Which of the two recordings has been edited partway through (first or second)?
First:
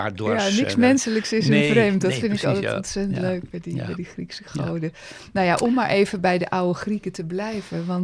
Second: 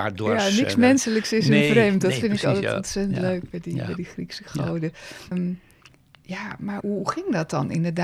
second